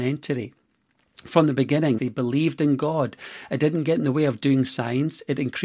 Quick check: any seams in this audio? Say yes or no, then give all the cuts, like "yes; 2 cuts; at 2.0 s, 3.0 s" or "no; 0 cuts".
yes; 1 cut; at 2.0 s